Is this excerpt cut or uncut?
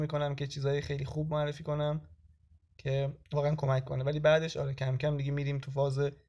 uncut